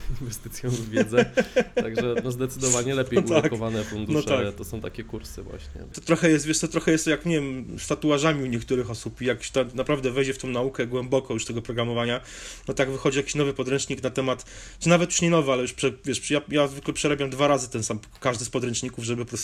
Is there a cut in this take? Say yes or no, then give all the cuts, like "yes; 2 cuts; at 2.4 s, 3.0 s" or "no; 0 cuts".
yes; 1 cut; at 5.9 s